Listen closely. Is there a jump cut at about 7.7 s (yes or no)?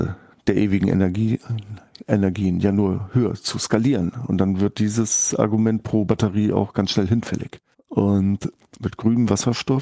yes